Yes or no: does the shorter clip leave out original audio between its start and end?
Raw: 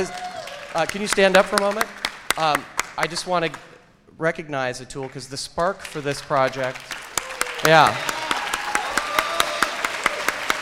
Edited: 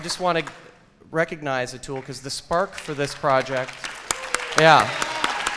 no